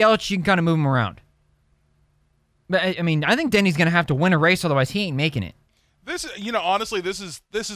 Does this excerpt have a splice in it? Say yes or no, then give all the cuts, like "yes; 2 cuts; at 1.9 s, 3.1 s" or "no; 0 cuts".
no; 0 cuts